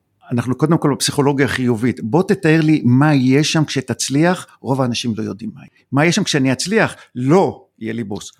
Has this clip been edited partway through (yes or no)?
no